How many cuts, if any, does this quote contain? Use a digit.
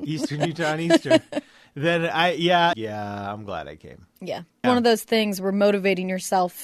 2